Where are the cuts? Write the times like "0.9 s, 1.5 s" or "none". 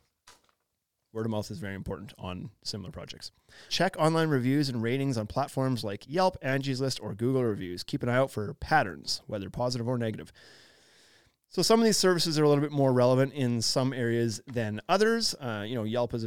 3.7 s